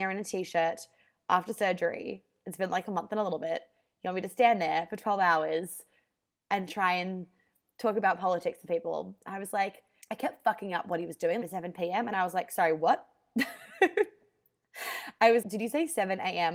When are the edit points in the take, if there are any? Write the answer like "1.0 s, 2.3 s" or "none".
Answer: 10.0 s, 11.4 s, 15.4 s